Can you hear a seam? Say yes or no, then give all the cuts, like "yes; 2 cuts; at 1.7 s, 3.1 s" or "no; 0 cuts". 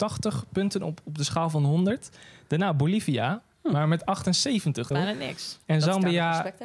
yes; 1 cut; at 4.9 s